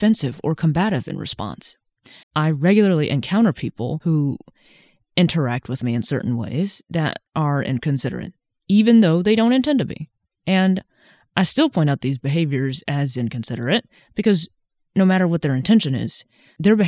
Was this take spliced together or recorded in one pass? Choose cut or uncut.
cut